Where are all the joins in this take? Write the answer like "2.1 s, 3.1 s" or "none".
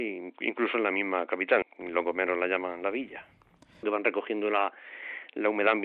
1.6 s, 3.8 s

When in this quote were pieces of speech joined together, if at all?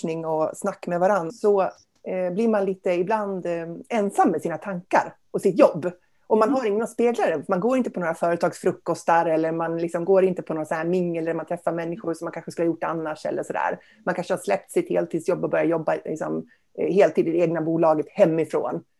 1.3 s

